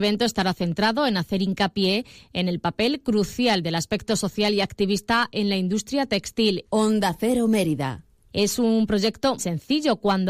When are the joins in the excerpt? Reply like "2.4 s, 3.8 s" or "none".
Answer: 6.6 s, 8.3 s, 9.4 s